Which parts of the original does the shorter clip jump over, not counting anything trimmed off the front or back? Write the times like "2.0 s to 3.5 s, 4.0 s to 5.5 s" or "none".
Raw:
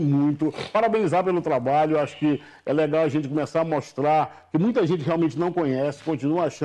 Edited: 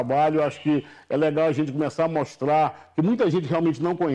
none